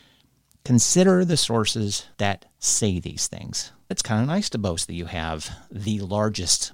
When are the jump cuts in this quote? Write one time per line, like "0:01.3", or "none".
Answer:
0:02.1
0:03.9